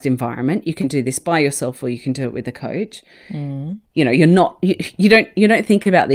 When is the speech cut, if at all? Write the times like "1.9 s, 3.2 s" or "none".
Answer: none